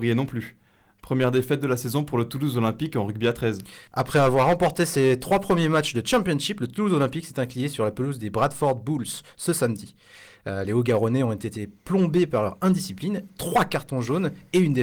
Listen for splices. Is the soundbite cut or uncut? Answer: uncut